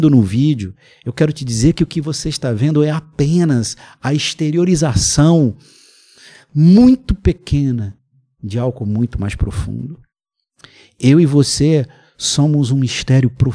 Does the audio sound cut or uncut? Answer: uncut